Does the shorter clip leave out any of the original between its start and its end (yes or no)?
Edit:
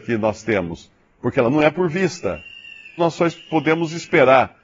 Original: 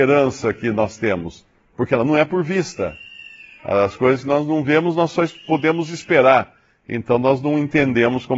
yes